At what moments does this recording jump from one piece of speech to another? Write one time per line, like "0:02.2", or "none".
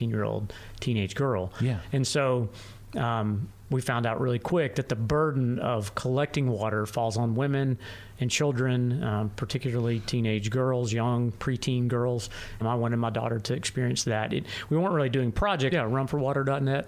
0:12.6
0:15.7